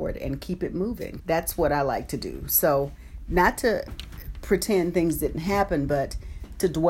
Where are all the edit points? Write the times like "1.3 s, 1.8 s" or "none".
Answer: 1.2 s